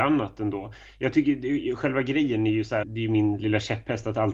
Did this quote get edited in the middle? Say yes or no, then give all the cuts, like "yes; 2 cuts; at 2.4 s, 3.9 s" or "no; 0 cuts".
yes; 1 cut; at 2.8 s